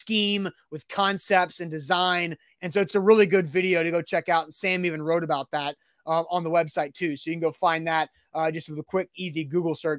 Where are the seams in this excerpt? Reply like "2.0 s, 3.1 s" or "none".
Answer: none